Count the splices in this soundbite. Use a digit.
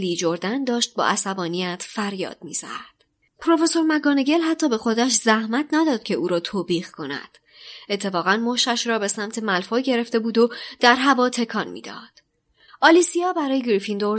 2